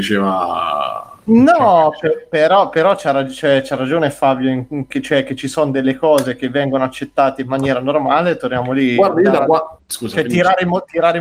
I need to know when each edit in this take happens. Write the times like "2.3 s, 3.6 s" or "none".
none